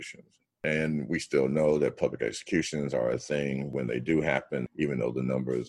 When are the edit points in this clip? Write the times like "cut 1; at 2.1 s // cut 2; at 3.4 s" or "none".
cut 1; at 4.7 s